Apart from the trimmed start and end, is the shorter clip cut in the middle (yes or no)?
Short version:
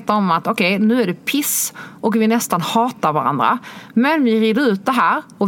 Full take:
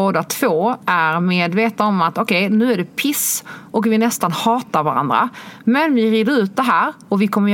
no